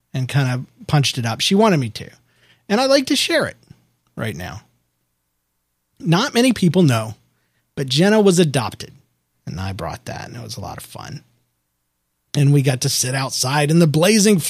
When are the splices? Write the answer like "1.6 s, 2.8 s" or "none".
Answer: 9.3 s